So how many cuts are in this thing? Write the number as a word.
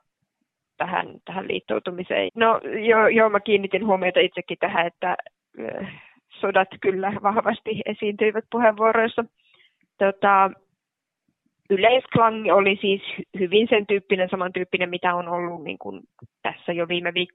one